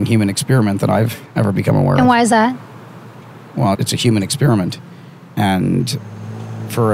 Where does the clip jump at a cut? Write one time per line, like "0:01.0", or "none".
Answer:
0:01.3
0:03.7